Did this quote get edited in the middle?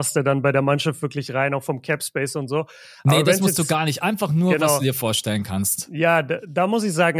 no; 0 cuts

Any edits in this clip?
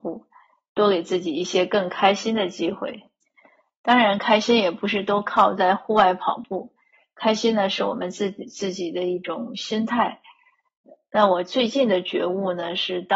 no; 0 cuts

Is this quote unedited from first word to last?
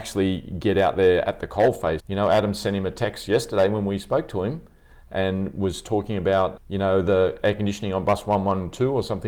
no; 2 cuts; at 2.0 s, 6.6 s

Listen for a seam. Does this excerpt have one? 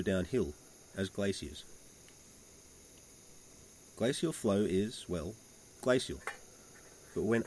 no; 0 cuts

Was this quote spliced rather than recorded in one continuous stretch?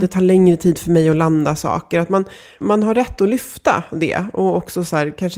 yes; 1 cut; at 2.6 s

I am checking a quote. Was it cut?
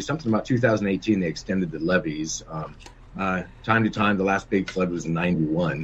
yes; 1 cut; at 3.0 s

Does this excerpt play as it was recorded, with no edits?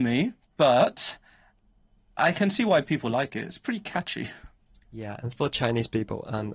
yes; 0 cuts

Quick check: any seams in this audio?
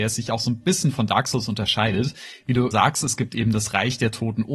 yes; 1 cut; at 2.7 s

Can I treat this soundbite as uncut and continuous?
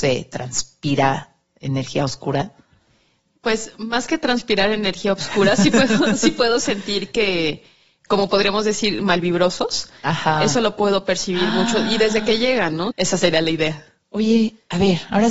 no; 1 cut; at 12.9 s

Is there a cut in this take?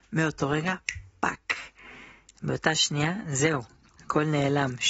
no; 0 cuts

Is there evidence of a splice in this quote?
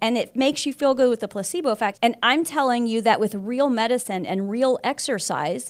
yes; 1 cut; at 1.9 s

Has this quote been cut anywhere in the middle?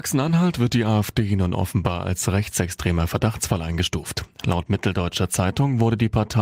no; 0 cuts

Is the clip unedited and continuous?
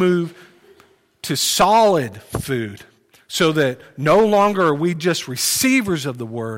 yes; 0 cuts

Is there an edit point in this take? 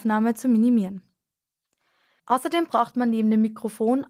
yes; 1 cut; at 2.2 s

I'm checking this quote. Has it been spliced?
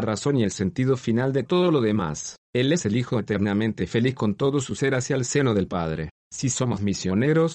yes; 1 cut; at 2.4 s

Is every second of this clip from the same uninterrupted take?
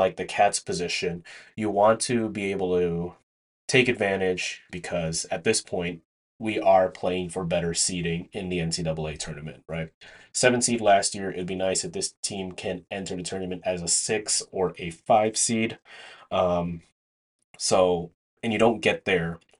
no; 1 cut; at 4.7 s

